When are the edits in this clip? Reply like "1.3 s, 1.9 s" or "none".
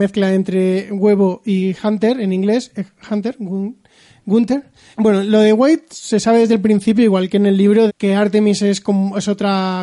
4.9 s, 7.9 s